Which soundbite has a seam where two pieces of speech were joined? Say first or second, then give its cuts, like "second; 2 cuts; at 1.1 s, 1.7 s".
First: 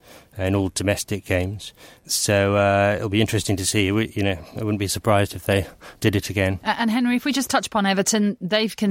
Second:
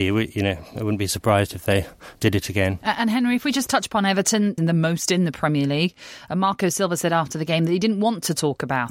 second; 1 cut; at 4.6 s